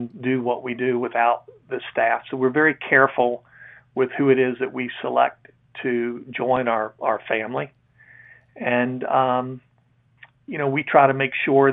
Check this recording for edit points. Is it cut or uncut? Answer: uncut